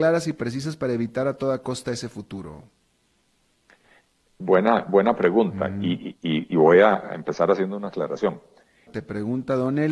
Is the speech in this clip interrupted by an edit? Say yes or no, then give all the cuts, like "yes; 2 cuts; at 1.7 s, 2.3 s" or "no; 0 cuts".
yes; 1 cut; at 8.9 s